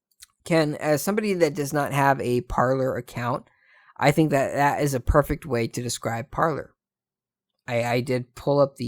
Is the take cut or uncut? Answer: uncut